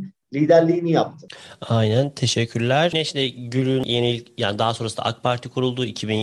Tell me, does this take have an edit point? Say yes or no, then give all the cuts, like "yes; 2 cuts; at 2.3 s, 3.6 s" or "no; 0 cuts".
no; 0 cuts